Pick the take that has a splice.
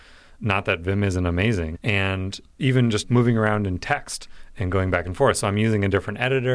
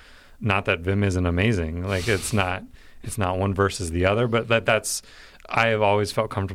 first; 1 cut; at 1.7 s

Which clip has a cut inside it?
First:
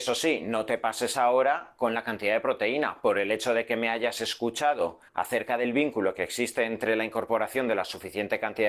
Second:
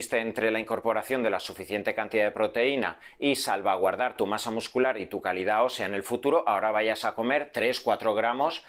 first; 1 cut; at 5.1 s

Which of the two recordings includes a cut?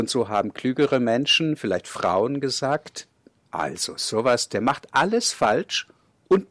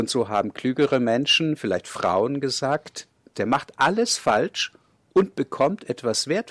second; 1 cut; at 3.3 s

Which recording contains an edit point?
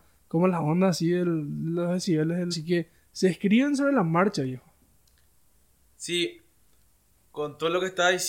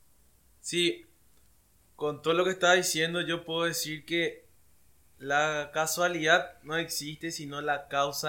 first; 1 cut; at 2.5 s

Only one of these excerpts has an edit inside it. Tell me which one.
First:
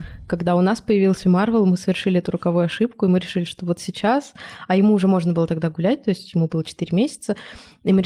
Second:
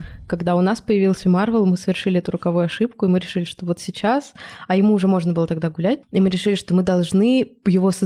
second; 1 cut; at 6.0 s

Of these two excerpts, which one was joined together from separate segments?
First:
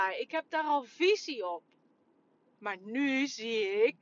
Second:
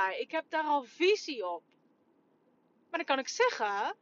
first; 1 cut; at 2.6 s

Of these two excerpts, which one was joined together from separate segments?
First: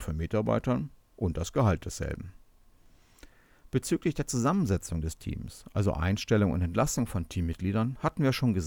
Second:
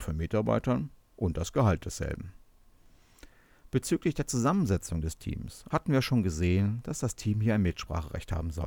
second; 1 cut; at 5.7 s

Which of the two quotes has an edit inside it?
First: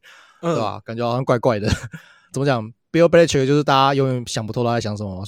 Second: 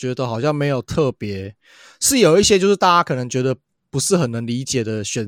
first; 1 cut; at 2.3 s

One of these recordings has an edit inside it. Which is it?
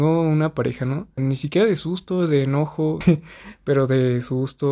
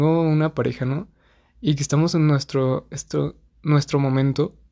first; 2 cuts; at 1.2 s, 3.0 s

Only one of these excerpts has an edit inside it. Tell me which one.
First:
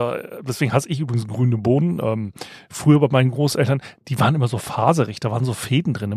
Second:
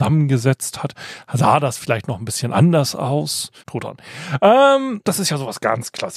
second; 2 cuts; at 3.6 s, 5.0 s

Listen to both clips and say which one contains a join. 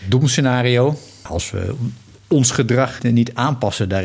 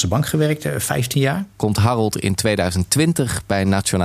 first; 2 cuts; at 1.3 s, 3.0 s

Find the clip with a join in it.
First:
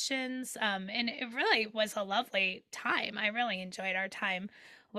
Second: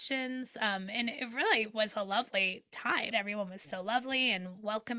second; 1 cut; at 3.1 s

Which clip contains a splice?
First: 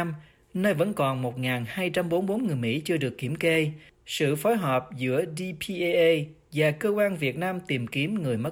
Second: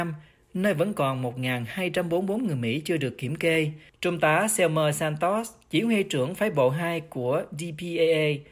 second; 1 cut; at 3.9 s

